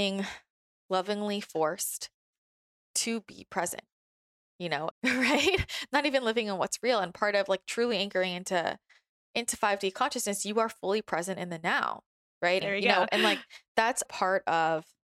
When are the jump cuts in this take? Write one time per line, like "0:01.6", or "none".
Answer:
0:04.9
0:12.6
0:14.0